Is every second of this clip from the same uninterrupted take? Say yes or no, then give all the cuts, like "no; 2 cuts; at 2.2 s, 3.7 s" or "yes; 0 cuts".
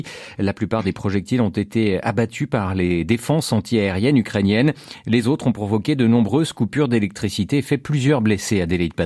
yes; 0 cuts